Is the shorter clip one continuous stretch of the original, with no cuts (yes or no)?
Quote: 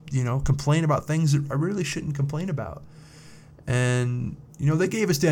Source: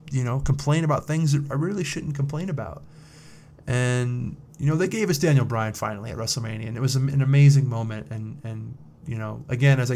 yes